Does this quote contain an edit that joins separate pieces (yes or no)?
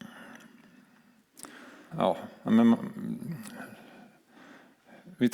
yes